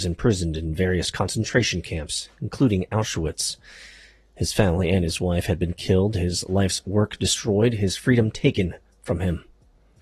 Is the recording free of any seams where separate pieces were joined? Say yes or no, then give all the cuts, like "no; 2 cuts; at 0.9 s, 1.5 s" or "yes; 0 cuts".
yes; 0 cuts